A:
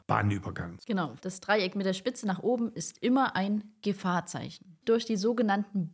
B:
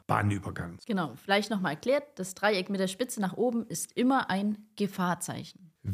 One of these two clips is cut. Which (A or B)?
A